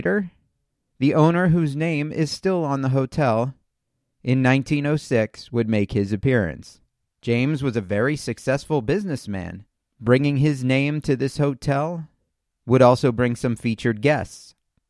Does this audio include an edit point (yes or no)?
yes